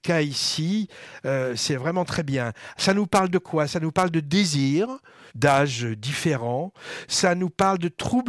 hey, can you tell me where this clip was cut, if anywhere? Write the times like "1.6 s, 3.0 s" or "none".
5.3 s